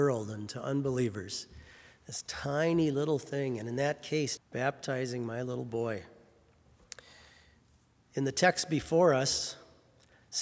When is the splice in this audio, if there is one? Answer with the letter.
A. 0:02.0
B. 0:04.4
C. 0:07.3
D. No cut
B